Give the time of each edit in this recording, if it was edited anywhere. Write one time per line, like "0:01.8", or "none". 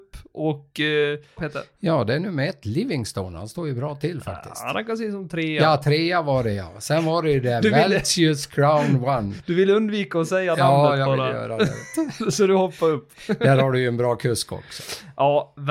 0:01.4